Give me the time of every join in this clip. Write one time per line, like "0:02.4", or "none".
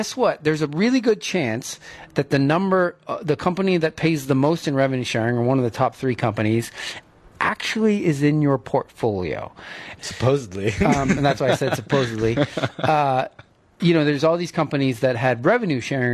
0:10.0
0:13.8